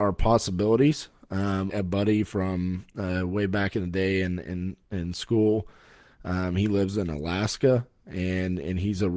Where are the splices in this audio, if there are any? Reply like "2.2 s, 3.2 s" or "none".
1.7 s